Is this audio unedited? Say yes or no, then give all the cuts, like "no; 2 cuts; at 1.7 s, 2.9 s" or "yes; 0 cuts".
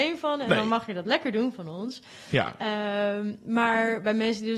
yes; 0 cuts